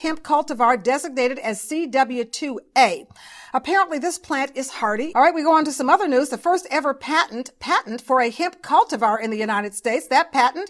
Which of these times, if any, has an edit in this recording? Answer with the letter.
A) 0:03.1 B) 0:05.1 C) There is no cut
B